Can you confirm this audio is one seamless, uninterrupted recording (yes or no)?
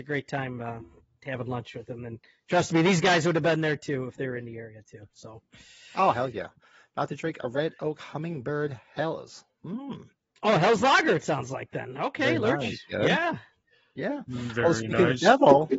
yes